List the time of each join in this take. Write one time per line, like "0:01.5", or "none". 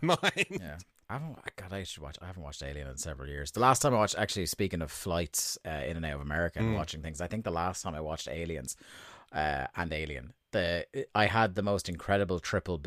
none

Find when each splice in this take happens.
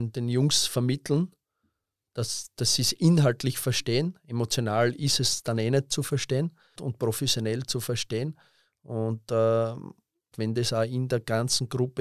0:06.8
0:10.3

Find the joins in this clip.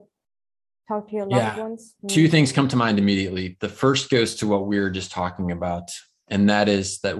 0:02.0

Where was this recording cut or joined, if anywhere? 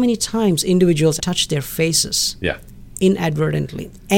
0:01.2

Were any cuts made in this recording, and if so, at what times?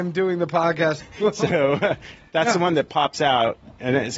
0:01.0

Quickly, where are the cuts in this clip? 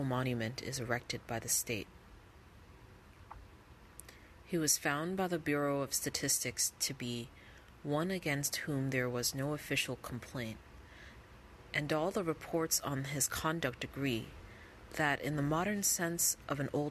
none

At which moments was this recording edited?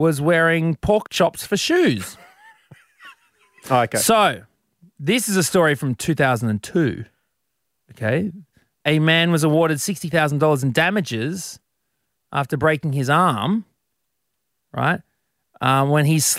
0:03.6

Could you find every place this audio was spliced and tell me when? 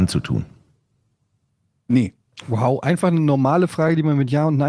none

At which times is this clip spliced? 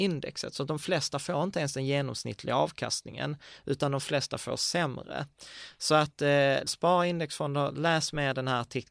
0:06.7

